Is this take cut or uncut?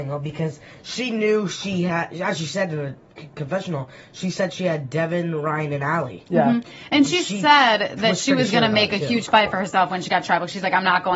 uncut